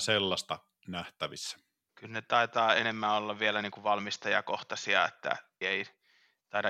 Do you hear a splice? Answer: yes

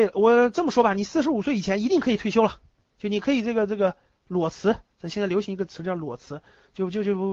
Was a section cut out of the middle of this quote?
no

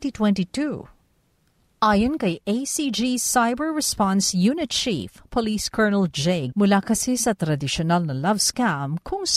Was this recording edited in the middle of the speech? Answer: yes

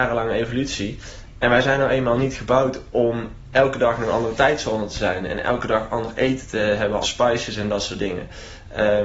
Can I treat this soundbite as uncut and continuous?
no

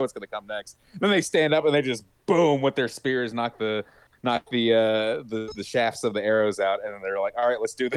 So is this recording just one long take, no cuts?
yes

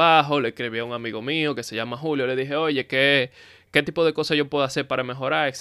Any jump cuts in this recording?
yes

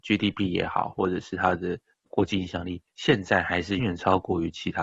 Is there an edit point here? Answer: yes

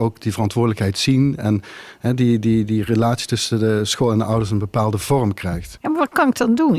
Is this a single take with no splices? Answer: no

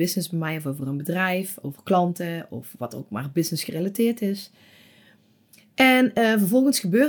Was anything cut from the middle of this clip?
no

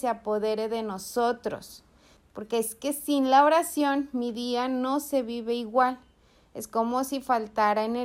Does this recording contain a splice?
yes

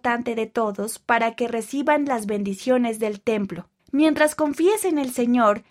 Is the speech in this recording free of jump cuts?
no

